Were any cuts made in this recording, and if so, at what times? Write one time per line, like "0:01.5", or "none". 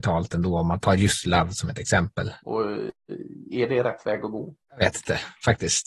0:02.4
0:04.6